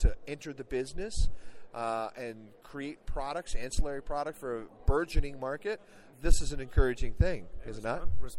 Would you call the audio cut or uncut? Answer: cut